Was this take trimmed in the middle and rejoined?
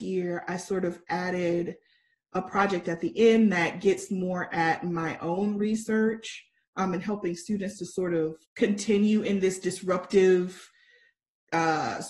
yes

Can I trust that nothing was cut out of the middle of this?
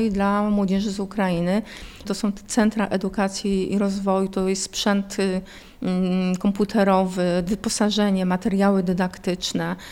no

